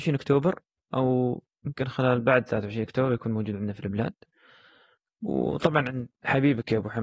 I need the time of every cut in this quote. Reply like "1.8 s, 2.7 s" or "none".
none